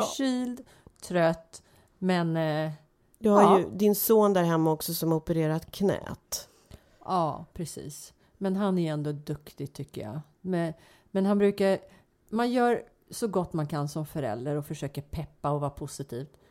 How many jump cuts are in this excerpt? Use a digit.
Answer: 0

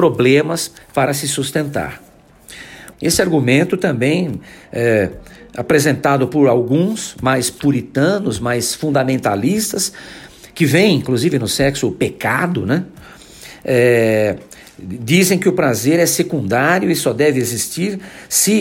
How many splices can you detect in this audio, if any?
1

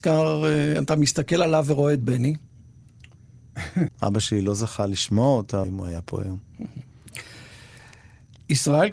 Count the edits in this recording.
2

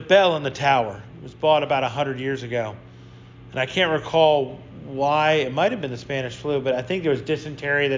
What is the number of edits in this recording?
0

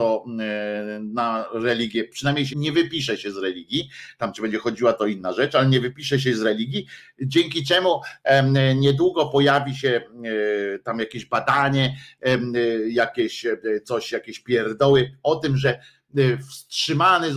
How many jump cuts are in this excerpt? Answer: 1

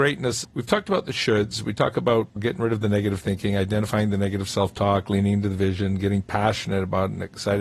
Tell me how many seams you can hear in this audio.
0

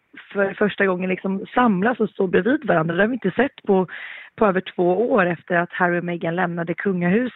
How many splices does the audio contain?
0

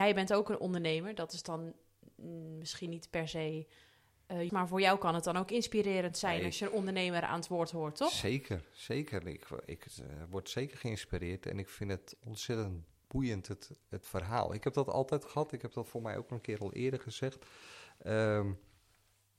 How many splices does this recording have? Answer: 1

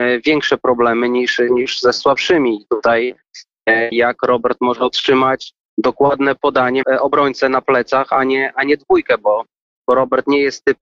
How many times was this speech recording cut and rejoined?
2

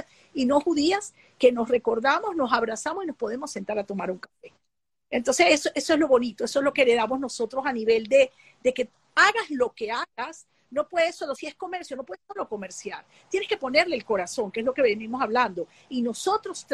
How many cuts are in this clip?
0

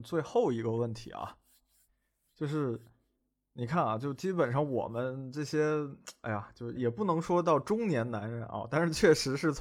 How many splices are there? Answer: 1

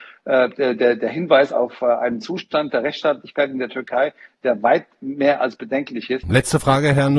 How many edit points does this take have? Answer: 1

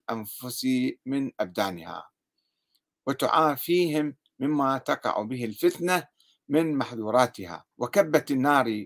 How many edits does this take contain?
1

